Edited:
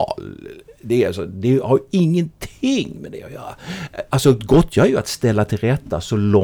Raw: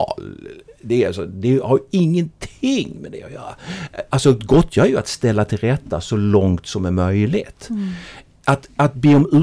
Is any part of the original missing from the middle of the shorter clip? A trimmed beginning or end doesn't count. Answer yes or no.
no